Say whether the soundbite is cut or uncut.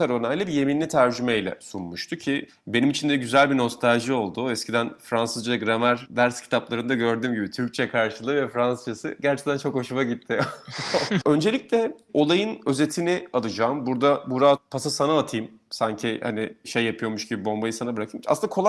cut